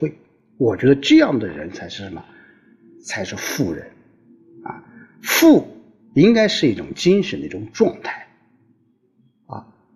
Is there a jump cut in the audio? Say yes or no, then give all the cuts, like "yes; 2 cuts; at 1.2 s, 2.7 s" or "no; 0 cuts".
no; 0 cuts